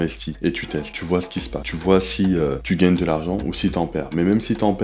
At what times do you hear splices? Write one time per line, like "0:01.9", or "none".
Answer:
none